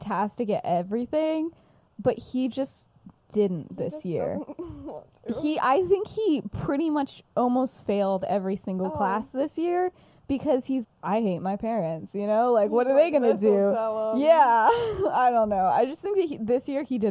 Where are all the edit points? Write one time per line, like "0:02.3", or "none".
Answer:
0:10.8